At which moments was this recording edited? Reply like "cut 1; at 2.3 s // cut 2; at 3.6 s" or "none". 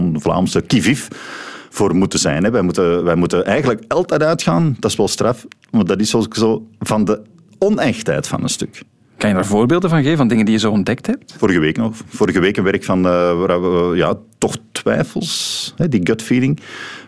none